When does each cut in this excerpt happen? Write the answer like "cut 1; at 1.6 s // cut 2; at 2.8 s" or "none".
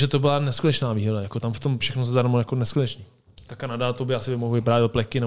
cut 1; at 1.8 s